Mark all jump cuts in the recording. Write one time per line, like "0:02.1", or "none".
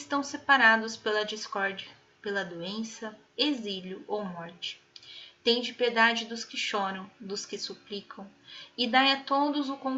0:03.3